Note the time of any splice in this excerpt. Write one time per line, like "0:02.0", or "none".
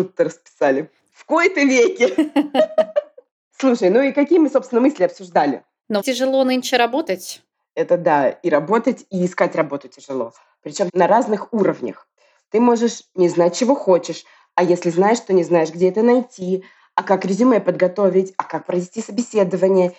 0:01.1
0:06.0
0:10.9